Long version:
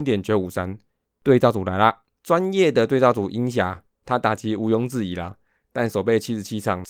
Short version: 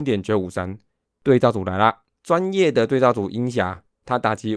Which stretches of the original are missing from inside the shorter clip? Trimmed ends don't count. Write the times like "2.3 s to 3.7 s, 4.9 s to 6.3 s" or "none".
none